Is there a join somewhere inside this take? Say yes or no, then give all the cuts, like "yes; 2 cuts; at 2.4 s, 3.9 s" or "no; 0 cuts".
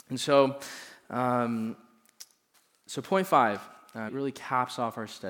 yes; 1 cut; at 4.1 s